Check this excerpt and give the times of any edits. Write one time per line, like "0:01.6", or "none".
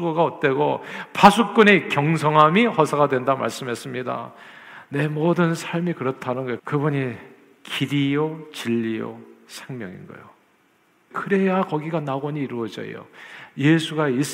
0:06.6
0:11.1